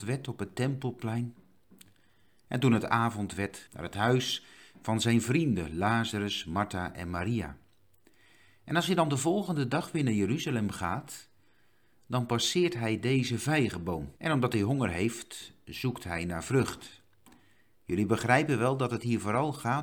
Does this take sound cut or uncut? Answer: cut